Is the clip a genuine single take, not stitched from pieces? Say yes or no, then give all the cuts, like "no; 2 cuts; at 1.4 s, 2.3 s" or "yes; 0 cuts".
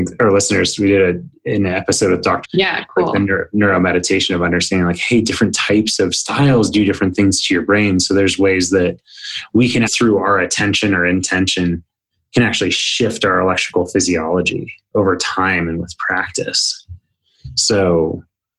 no; 2 cuts; at 2.4 s, 9.9 s